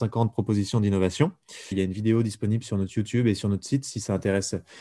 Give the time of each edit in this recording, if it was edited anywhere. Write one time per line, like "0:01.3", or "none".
0:01.7